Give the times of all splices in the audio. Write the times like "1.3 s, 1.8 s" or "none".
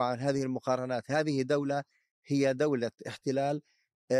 none